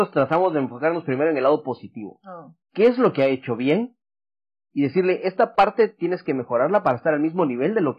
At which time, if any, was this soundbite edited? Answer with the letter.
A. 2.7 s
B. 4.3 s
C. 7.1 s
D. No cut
D